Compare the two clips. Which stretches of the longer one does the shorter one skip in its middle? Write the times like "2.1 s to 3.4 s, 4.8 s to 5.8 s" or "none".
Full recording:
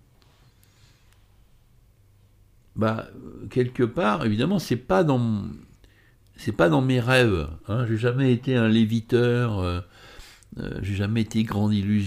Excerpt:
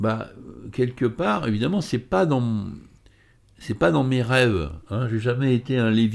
none